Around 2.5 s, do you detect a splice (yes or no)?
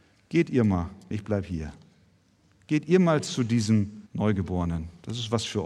no